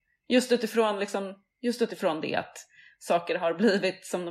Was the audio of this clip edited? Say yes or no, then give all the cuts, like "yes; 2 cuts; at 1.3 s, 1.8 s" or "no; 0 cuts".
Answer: yes; 1 cut; at 1.5 s